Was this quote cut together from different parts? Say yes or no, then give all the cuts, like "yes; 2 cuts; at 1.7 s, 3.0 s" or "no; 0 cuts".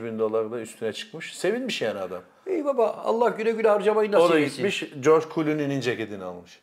no; 0 cuts